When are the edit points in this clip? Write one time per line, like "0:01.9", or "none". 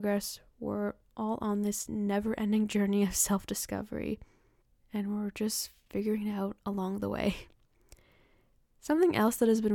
none